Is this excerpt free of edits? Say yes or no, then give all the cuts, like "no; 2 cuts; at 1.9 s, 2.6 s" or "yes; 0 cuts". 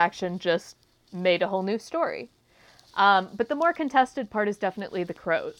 yes; 0 cuts